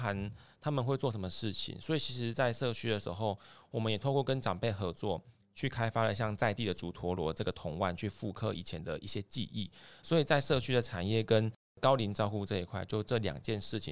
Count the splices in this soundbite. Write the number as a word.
one